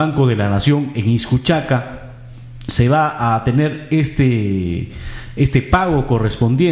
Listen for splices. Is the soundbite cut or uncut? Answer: uncut